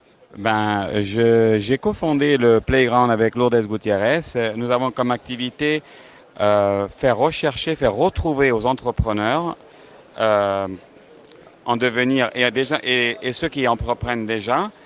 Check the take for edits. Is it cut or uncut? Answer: uncut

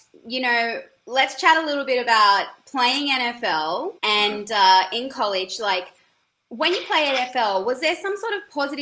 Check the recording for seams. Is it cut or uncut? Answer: cut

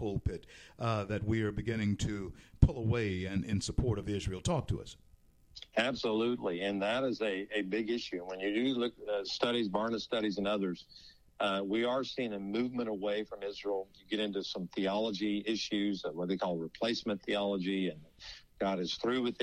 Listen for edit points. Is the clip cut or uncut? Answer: uncut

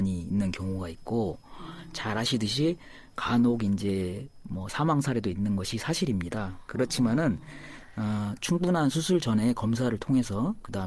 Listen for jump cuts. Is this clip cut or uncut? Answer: uncut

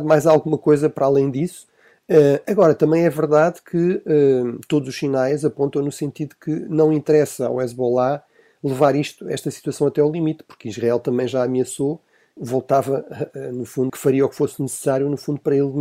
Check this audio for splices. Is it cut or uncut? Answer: cut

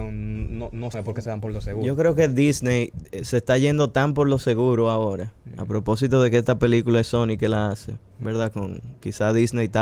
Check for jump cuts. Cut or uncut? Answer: cut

